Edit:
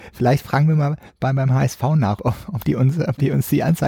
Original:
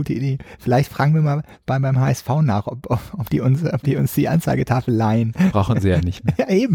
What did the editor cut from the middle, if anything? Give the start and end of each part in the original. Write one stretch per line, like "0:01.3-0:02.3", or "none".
0:02.6-0:02.8